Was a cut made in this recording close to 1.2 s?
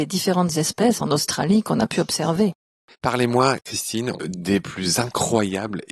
no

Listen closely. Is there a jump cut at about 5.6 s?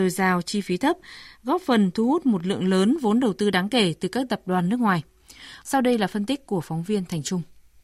yes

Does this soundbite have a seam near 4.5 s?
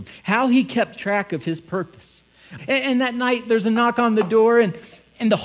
no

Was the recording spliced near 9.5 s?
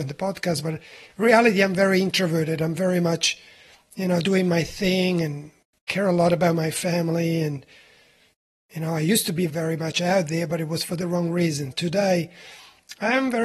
yes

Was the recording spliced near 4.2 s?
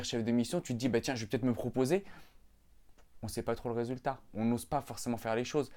no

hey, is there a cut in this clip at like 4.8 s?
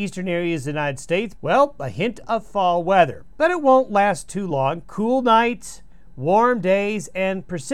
yes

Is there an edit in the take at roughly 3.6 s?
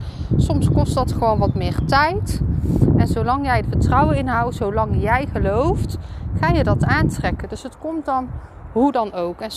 yes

